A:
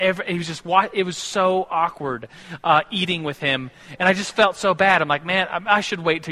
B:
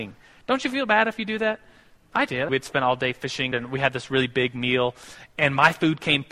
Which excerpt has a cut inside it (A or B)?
B